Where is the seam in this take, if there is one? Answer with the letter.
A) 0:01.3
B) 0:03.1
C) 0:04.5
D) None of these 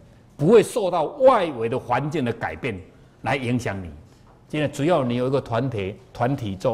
C